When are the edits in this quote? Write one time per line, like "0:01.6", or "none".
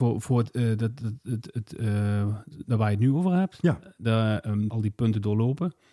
0:04.7

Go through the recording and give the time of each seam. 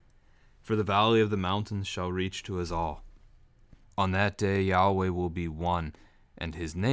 0:03.8

